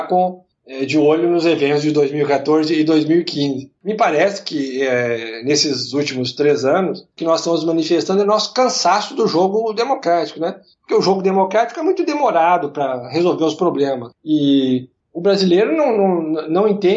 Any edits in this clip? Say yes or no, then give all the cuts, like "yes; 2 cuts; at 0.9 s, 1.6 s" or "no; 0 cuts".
no; 0 cuts